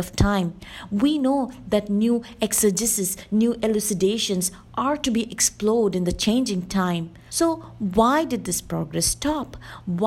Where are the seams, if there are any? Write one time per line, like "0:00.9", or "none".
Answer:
0:07.3